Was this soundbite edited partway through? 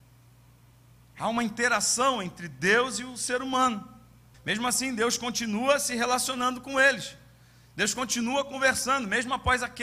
yes; 1 cut; at 4.3 s

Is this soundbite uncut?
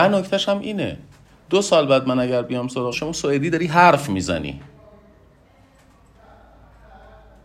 no; 1 cut; at 2.9 s

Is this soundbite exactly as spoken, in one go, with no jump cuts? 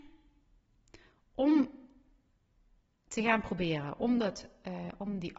yes; 0 cuts

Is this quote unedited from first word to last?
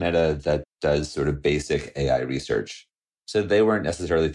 yes; 0 cuts

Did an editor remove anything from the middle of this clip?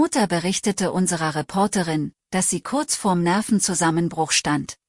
no; 0 cuts

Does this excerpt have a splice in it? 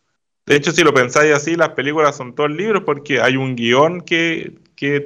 no; 0 cuts

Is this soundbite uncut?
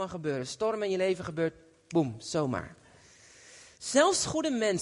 yes; 0 cuts

